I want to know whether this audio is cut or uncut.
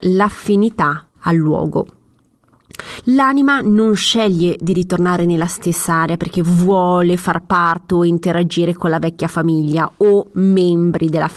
cut